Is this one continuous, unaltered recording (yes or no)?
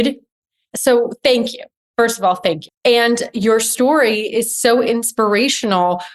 no